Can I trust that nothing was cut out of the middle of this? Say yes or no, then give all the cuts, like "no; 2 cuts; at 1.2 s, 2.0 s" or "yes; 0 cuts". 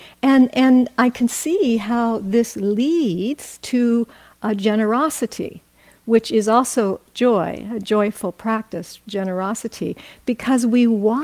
yes; 0 cuts